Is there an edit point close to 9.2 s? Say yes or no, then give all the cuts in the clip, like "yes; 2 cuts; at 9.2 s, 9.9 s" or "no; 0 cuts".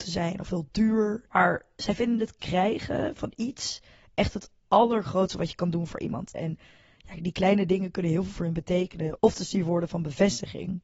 yes; 3 cuts; at 1.3 s, 6.3 s, 9.2 s